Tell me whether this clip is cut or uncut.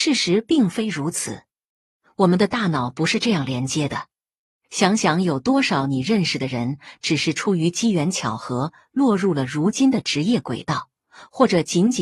uncut